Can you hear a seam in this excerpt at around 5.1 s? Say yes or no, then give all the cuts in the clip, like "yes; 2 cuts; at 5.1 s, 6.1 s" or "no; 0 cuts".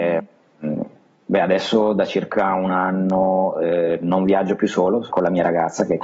yes; 1 cut; at 5.1 s